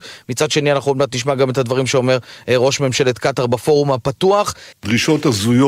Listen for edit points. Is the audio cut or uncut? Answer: cut